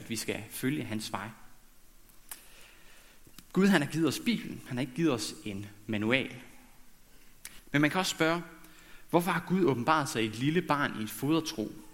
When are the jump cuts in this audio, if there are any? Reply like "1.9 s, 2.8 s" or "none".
7.6 s